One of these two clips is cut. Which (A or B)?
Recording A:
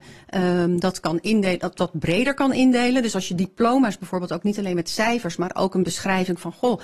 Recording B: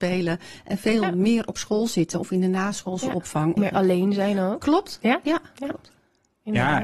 B